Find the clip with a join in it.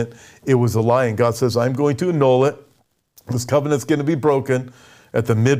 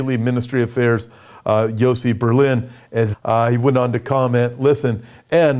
second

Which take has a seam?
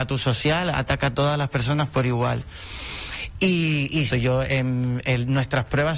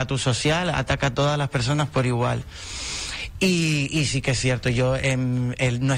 first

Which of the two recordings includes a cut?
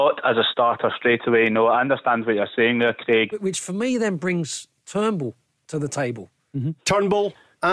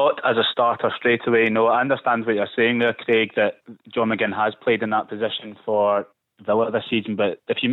first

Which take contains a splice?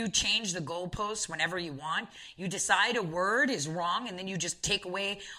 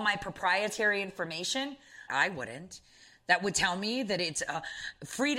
second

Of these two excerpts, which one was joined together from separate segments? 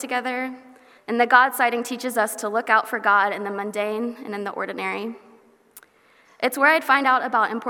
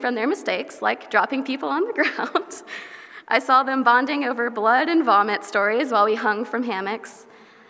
first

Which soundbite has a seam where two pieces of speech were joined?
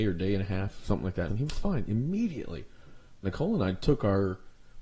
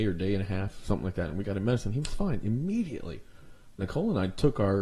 first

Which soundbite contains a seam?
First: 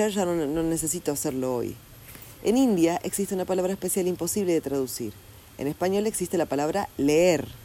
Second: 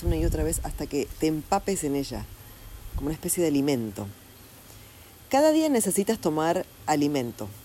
first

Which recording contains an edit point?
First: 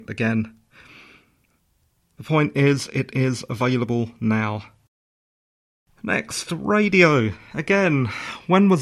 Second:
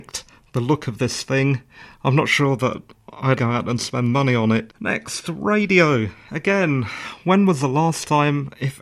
second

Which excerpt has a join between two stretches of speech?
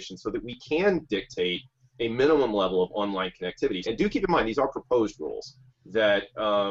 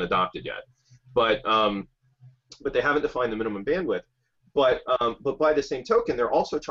first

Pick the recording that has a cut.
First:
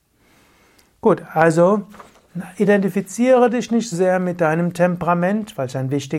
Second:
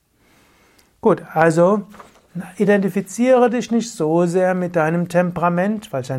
first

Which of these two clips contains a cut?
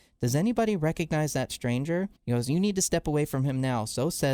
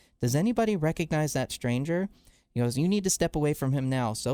first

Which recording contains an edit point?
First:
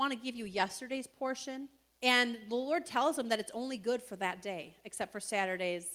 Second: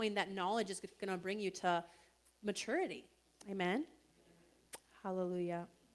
first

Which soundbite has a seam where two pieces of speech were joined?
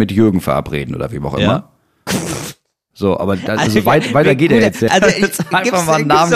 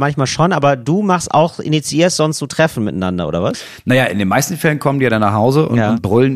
first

